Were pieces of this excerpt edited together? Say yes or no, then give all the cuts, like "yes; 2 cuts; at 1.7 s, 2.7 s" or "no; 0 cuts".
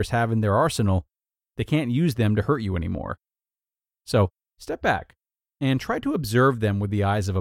yes; 1 cut; at 4.4 s